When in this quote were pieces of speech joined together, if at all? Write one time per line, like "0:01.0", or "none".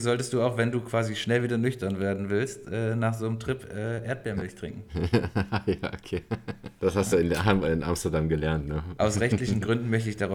none